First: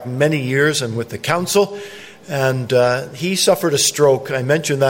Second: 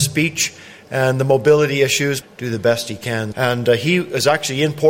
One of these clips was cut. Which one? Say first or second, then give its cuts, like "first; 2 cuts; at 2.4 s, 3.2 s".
second; 2 cuts; at 2.2 s, 3.3 s